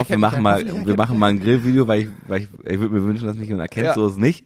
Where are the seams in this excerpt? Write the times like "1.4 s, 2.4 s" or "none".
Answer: none